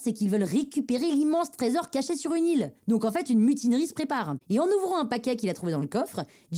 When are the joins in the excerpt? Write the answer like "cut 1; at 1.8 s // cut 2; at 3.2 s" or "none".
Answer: cut 1; at 2.8 s // cut 2; at 4.4 s